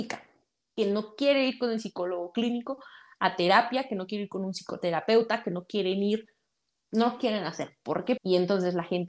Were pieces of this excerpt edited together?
yes; 1 cut; at 8.2 s

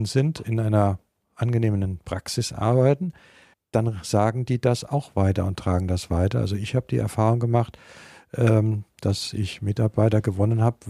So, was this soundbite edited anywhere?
yes; 1 cut; at 3.5 s

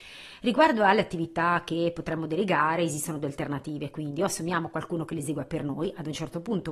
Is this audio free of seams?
yes; 0 cuts

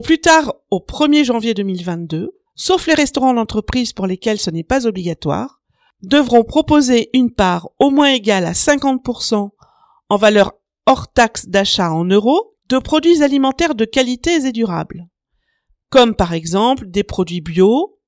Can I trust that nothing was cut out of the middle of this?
no; 2 cuts; at 2.5 s, 12.6 s

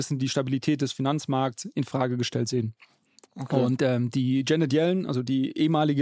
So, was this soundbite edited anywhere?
no; 0 cuts

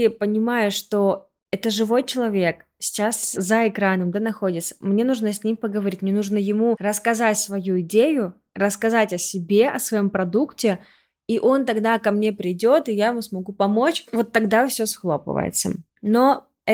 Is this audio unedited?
yes; 0 cuts

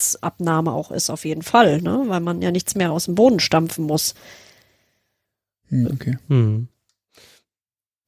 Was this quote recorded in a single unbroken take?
no; 1 cut; at 5.9 s

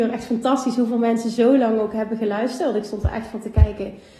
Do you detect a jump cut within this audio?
no; 0 cuts

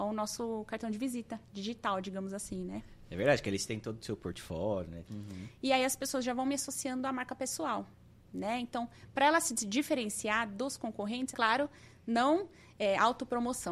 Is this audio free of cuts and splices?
no; 2 cuts; at 5.0 s, 11.3 s

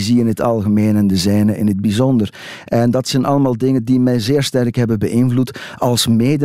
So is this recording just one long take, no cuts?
yes; 0 cuts

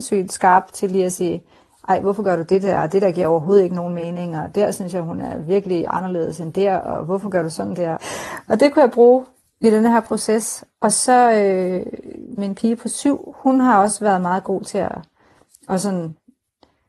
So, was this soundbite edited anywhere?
yes; 2 cuts; at 8.0 s, 12.4 s

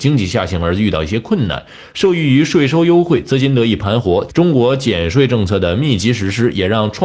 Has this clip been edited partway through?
yes; 1 cut; at 4.3 s

